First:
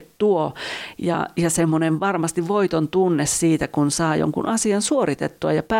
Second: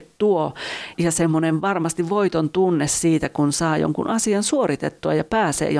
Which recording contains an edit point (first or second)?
second